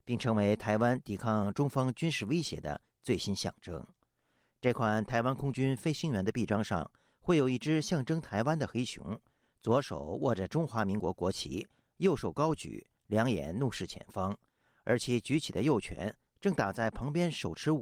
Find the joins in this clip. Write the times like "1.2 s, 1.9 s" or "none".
none